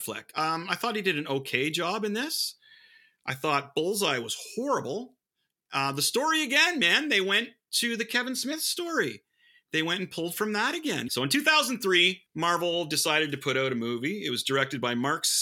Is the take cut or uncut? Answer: cut